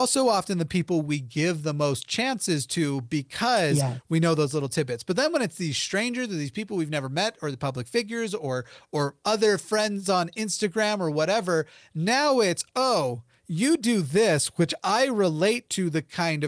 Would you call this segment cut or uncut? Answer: uncut